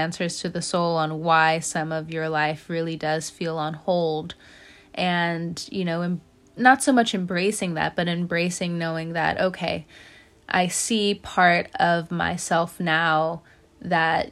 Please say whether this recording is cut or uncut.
uncut